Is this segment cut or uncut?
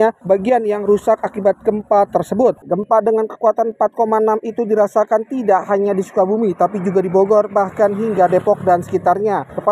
cut